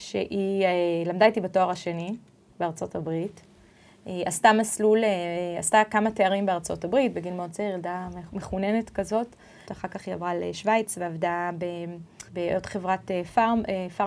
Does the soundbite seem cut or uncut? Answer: cut